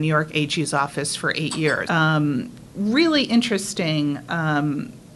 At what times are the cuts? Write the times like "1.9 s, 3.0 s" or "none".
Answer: 1.9 s

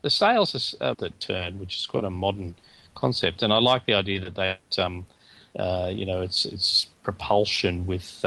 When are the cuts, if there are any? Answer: 0.9 s, 4.7 s

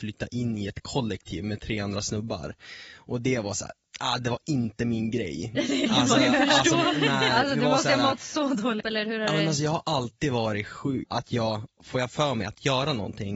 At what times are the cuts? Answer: 8.8 s, 11.0 s

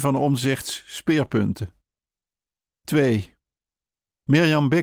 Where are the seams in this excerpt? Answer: none

